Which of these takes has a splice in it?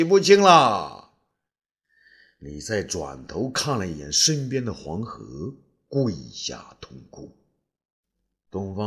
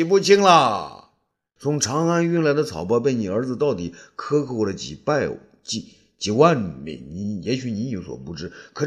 second; 1 cut; at 1.6 s

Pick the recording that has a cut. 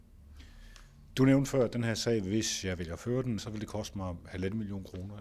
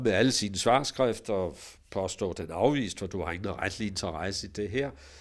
first; 1 cut; at 3.4 s

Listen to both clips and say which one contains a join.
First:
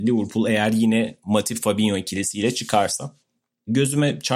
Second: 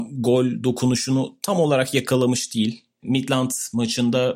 second; 1 cut; at 3.0 s

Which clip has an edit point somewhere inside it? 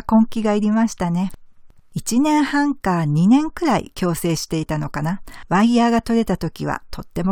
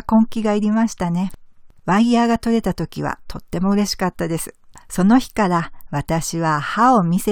second; 1 cut; at 1.8 s

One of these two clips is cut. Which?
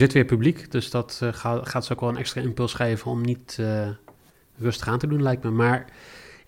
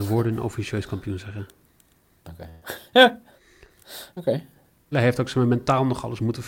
second; 1 cut; at 4.9 s

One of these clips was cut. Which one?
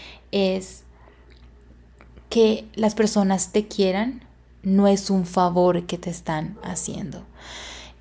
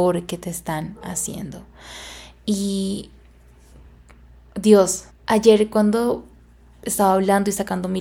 second; 1 cut; at 5.1 s

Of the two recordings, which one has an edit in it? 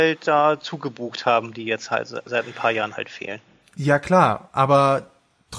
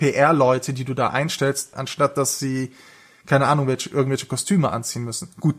second; 1 cut; at 1.7 s

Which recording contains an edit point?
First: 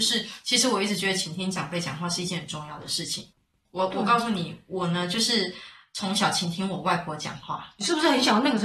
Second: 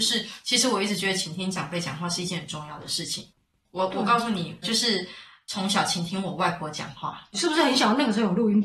second; 1 cut; at 4.6 s

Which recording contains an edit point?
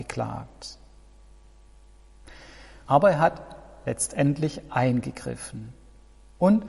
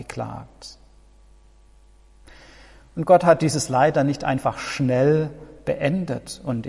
first; 1 cut; at 2.9 s

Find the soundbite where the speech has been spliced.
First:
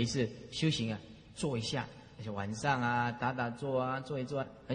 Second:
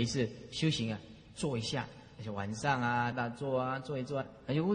second; 1 cut; at 3.1 s

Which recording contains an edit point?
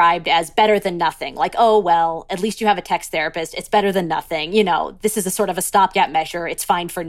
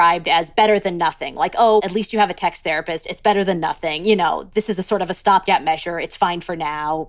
second; 1 cut; at 1.8 s

